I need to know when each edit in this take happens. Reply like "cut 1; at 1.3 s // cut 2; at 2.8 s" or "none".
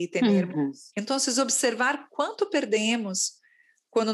cut 1; at 0.9 s